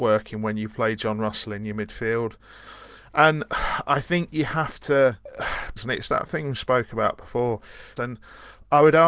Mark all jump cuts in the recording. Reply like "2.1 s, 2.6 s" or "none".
5.8 s, 8.0 s

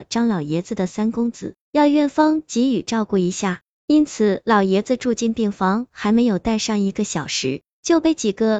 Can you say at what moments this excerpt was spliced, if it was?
1.6 s

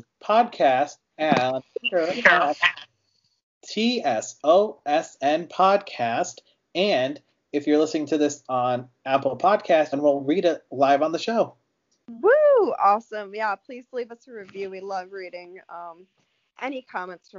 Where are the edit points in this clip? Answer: 9.9 s

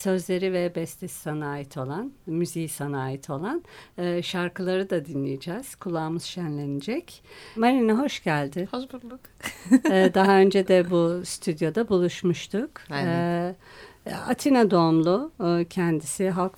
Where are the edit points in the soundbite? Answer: 7.6 s

